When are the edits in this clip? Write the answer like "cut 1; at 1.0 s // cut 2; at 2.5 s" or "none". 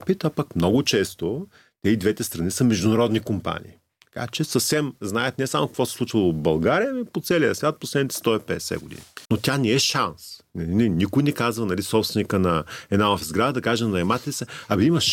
cut 1; at 9.3 s